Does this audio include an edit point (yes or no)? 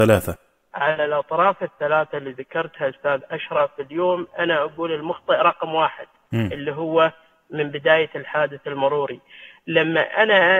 no